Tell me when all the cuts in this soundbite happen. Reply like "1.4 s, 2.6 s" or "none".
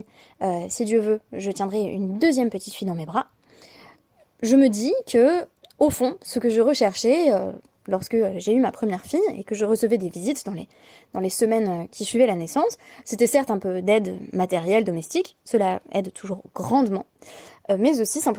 none